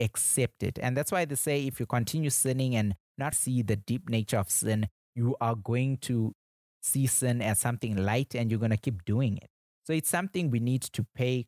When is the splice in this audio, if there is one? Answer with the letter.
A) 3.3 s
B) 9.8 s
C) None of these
A